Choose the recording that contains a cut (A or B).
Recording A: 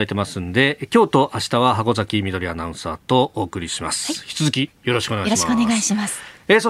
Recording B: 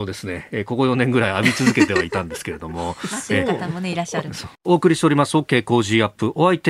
B